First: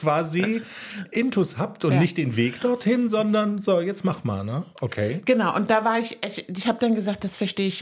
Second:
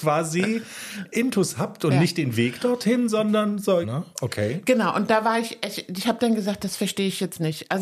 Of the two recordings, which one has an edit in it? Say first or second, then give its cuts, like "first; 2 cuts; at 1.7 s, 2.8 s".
second; 1 cut; at 3.8 s